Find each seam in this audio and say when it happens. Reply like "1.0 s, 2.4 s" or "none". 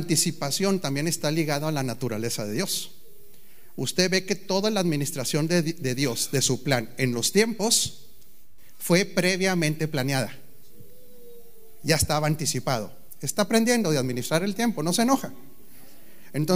none